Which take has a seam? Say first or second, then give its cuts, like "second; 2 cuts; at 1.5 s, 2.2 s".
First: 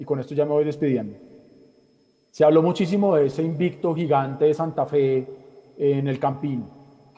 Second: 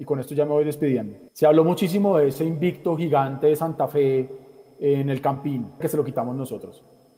second; 2 cuts; at 1.3 s, 5.8 s